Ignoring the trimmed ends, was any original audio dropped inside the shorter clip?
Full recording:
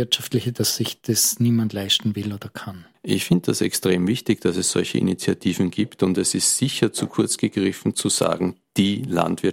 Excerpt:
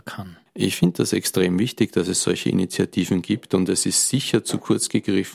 no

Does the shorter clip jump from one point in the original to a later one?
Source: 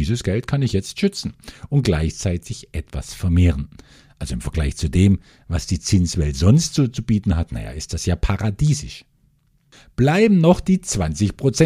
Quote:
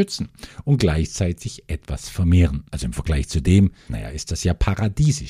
yes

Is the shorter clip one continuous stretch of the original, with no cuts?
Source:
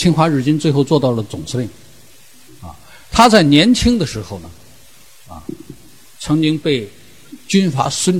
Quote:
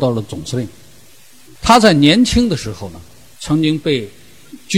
no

